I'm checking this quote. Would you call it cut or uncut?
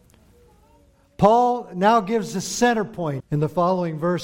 cut